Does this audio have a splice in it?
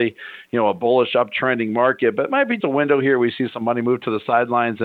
yes; 1 cut; at 2.6 s

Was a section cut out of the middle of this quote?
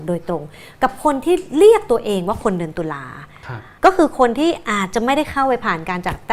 yes; 1 cut; at 3.8 s

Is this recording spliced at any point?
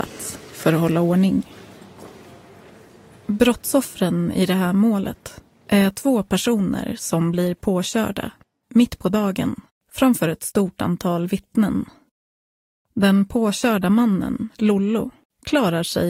no; 0 cuts

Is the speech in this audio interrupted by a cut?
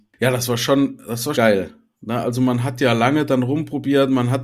yes; 1 cut; at 1.3 s

